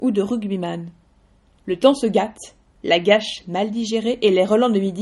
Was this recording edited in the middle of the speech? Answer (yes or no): no